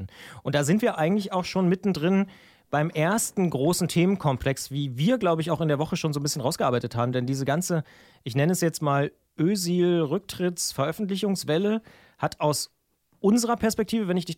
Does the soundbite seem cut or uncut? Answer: uncut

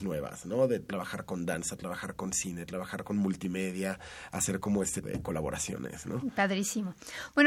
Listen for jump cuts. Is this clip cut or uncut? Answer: cut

